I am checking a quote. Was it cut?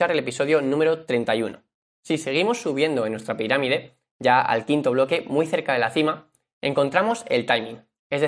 yes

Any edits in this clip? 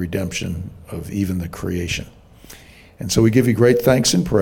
no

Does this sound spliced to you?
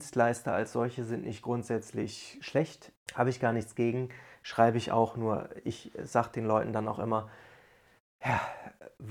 yes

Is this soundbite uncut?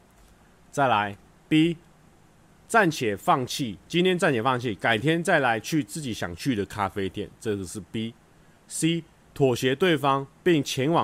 yes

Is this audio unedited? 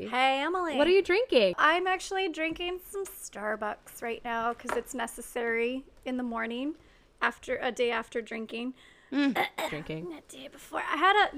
no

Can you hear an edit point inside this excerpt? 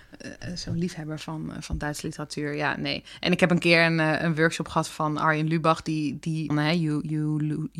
yes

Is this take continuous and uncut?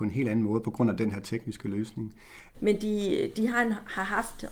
no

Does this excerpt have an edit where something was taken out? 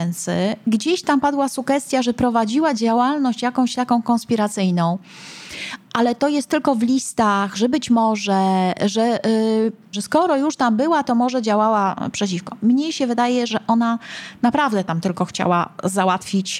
yes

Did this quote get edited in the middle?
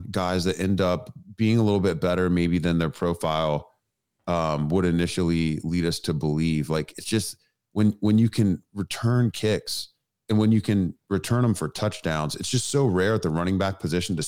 no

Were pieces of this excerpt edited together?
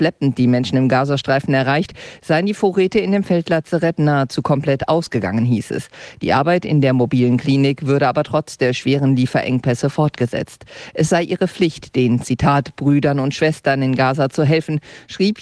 no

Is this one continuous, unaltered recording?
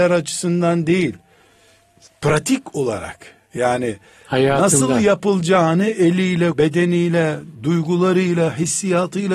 no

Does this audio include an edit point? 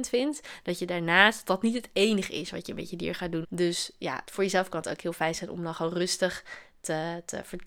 yes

